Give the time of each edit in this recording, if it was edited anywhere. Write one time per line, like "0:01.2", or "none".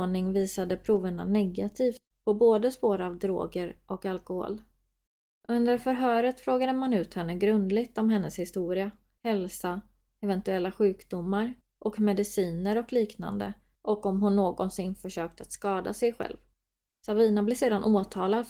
0:05.4
0:16.9